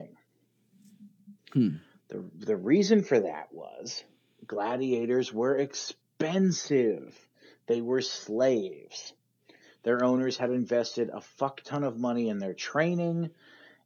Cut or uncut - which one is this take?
uncut